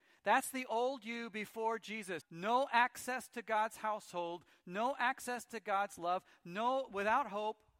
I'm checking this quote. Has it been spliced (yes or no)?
yes